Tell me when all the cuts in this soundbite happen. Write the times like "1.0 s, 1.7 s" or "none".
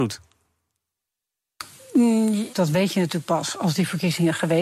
2.5 s